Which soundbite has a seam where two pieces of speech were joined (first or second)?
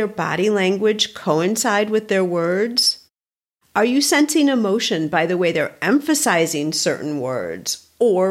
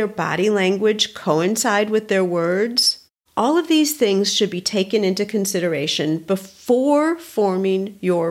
second